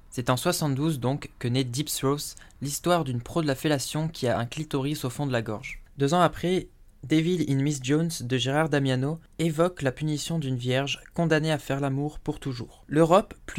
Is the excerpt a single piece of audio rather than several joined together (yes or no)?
yes